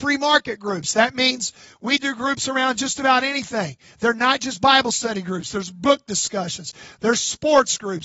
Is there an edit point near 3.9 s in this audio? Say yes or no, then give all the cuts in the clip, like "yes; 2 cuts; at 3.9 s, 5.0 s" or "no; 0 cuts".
no; 0 cuts